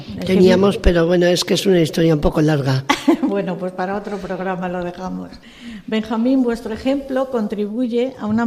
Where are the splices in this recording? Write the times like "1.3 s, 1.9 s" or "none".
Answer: none